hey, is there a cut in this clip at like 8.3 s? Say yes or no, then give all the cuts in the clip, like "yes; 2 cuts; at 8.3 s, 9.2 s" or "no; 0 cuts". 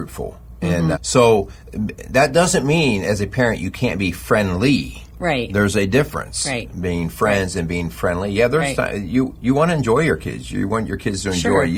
no; 1 cut; at 0.9 s